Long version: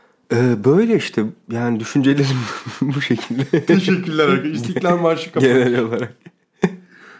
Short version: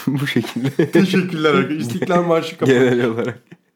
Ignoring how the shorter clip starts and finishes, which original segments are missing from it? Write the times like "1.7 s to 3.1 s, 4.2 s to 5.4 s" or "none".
none

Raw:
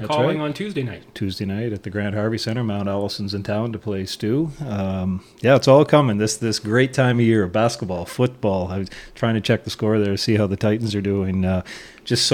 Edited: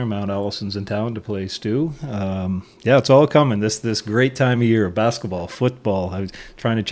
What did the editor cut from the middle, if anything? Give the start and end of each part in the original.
none

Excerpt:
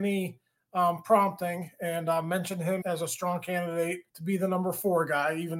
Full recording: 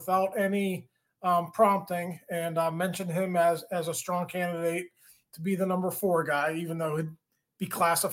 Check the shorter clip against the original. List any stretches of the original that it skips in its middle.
3.3 s to 3.7 s, 4.9 s to 5.3 s

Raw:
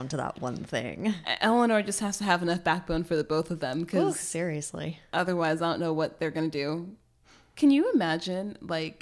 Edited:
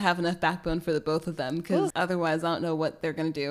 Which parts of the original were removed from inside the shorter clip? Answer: 4.1 s to 5.1 s

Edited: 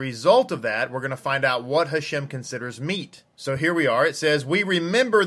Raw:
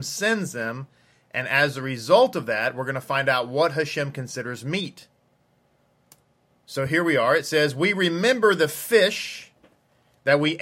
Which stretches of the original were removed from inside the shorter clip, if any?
5.1 s to 6.6 s

